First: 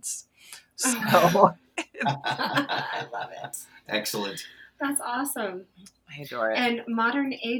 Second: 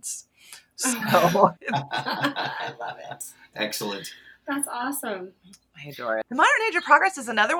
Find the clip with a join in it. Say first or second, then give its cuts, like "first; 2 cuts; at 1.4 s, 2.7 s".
second; 2 cuts; at 1.6 s, 6.2 s